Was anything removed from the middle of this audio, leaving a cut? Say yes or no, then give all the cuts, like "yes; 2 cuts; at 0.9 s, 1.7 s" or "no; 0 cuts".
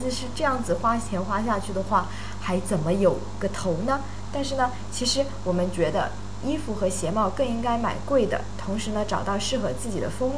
no; 0 cuts